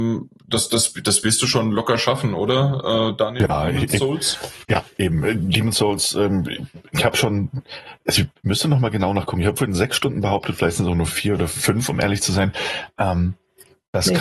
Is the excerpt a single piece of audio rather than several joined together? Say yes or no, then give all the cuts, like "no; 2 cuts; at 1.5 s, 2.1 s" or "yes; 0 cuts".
yes; 0 cuts